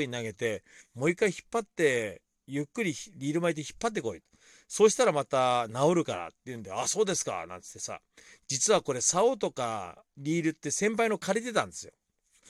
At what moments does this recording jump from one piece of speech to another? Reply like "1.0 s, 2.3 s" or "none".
none